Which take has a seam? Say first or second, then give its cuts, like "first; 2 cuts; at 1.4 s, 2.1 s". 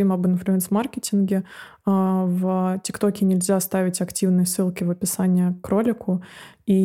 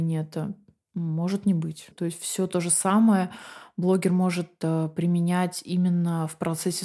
second; 1 cut; at 1.9 s